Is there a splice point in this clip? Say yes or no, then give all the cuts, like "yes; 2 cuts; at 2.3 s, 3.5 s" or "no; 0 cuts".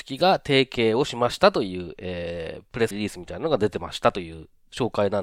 yes; 1 cut; at 2.9 s